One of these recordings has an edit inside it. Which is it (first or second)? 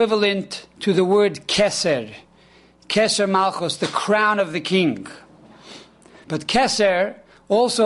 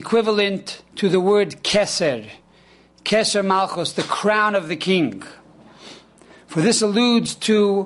first